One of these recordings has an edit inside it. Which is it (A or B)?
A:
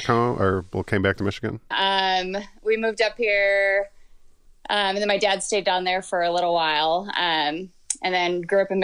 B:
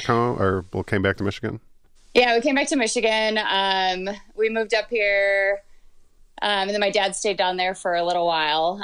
A